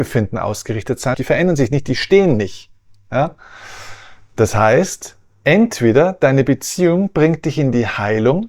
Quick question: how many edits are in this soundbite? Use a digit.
1